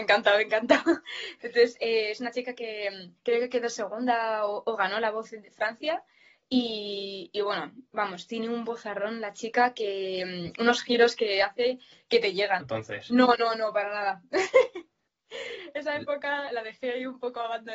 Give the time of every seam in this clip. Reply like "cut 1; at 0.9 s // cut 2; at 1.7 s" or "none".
cut 1; at 3.2 s // cut 2; at 12.6 s // cut 3; at 16.5 s